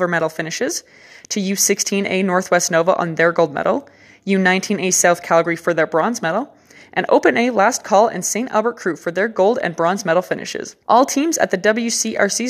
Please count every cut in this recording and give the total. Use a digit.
1